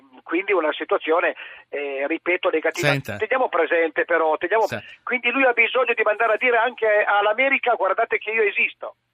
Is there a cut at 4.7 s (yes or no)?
yes